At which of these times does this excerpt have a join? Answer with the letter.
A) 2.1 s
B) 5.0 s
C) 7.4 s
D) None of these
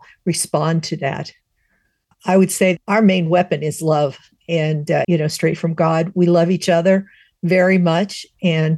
B